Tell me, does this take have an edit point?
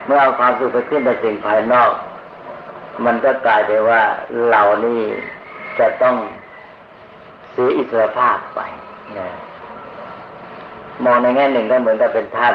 no; 0 cuts

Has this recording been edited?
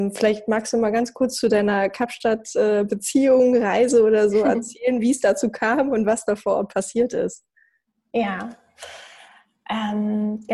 no; 0 cuts

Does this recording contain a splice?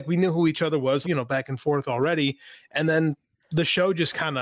yes; 1 cut; at 1.0 s

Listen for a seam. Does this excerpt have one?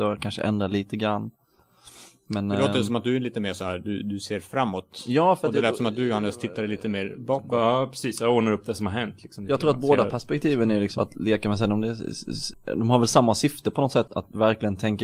yes; 2 cuts; at 11.0 s, 14.1 s

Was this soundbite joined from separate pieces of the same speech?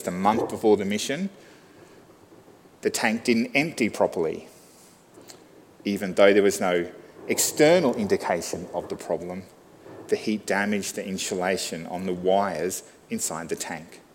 yes; 1 cut; at 5.7 s

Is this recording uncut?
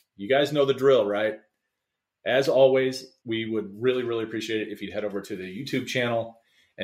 no; 1 cut; at 3.2 s

